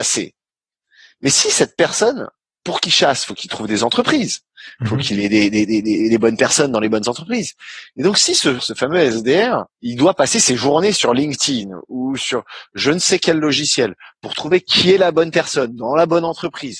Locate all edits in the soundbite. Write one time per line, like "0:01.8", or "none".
0:08.6
0:09.7